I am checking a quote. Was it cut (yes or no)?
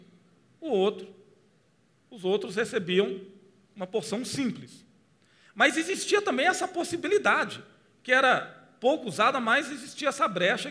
no